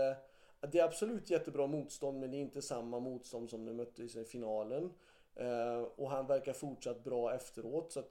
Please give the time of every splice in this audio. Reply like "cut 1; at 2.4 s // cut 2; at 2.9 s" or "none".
none